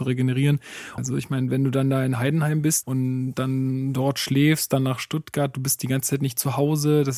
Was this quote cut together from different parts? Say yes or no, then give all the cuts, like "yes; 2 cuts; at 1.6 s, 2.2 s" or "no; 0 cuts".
yes; 2 cuts; at 1.0 s, 2.8 s